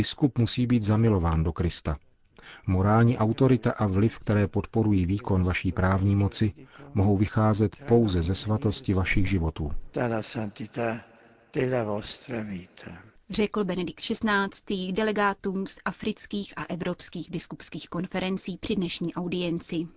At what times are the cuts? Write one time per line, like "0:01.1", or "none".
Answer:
none